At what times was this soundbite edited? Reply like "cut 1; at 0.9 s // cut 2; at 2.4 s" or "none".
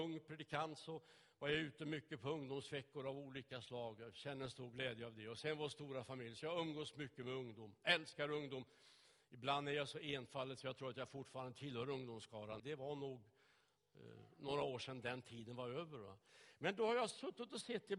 cut 1; at 12.6 s